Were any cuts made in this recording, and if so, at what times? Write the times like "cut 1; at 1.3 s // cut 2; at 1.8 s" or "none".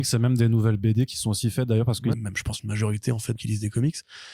cut 1; at 2.1 s // cut 2; at 3.4 s